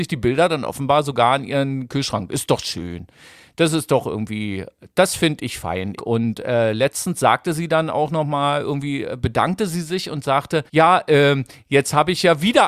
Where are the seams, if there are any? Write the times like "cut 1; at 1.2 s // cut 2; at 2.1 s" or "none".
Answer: cut 1; at 6.0 s // cut 2; at 10.7 s